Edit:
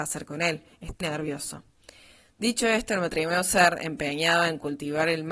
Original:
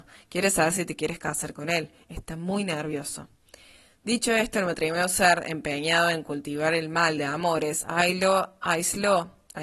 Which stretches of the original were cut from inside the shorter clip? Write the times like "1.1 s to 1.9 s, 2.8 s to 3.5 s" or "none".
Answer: 2.3 s to 2.7 s

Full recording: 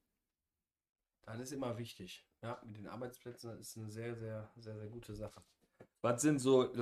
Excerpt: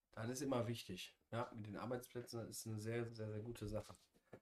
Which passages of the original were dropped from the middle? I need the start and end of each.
4.2 s to 4.5 s

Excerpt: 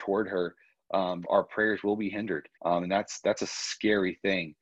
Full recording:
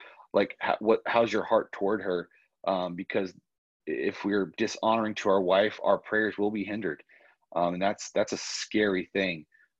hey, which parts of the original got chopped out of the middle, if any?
3.0 s to 5.8 s, 7.1 s to 7.4 s

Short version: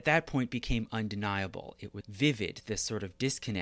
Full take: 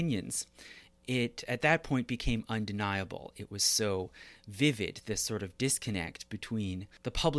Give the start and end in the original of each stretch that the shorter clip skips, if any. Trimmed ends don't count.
3.6 s to 4.4 s

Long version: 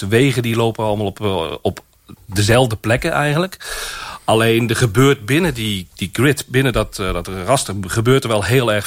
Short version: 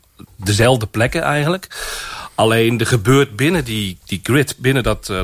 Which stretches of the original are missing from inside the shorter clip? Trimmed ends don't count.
none

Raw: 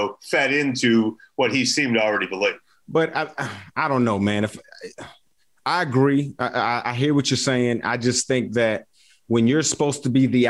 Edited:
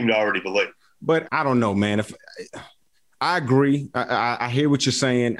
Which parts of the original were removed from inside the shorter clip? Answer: 3.1 s to 3.7 s

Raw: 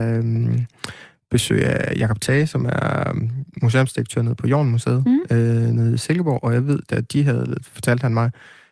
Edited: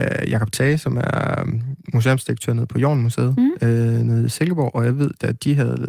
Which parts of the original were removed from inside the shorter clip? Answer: none

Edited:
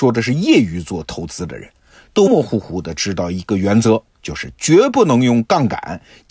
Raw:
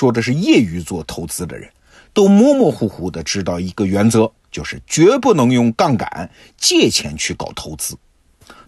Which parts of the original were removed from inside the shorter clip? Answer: 2.3 s to 2.6 s

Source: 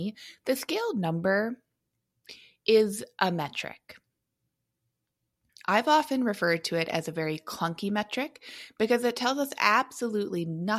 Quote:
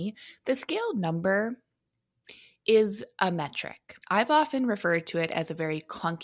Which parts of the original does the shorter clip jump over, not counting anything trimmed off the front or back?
4.0 s to 5.6 s

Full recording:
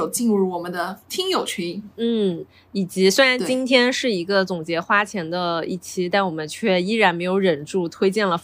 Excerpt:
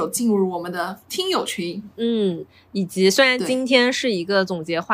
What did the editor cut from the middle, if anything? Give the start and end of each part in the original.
none

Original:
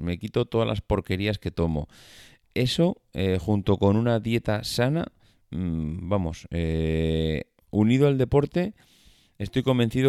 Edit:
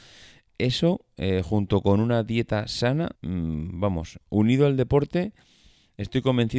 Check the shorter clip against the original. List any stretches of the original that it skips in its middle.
5.1 s to 5.4 s, 6.5 s to 7.6 s

